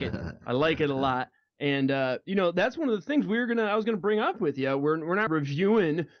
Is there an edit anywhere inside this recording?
yes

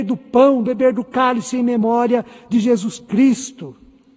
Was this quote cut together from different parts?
no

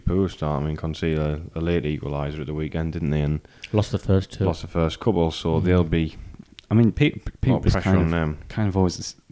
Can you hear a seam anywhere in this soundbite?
no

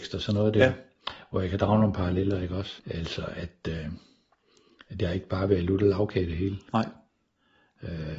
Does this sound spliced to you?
yes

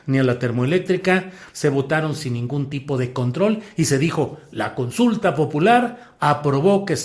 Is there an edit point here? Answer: yes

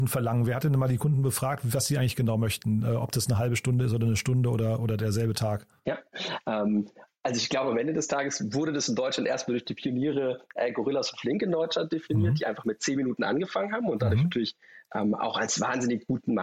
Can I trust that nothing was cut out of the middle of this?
yes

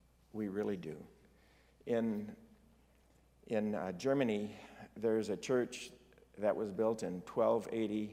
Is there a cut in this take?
no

